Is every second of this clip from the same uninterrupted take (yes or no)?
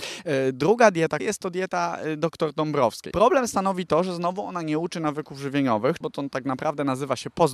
no